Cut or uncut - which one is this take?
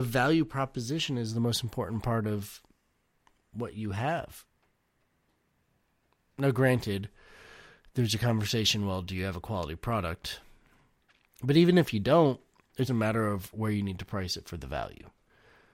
cut